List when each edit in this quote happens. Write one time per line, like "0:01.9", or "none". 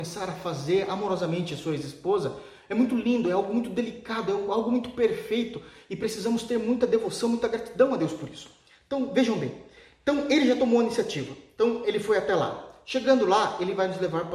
none